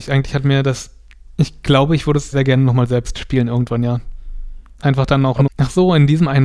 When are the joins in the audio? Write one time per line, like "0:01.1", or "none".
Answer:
0:02.3
0:05.5